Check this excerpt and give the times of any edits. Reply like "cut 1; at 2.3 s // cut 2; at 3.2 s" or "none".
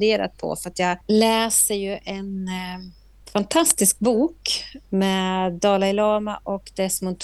cut 1; at 1.0 s